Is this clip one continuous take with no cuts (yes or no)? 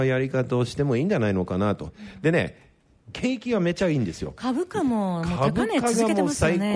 no